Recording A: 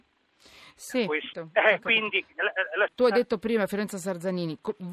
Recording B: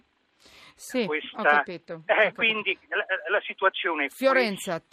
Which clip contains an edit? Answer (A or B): A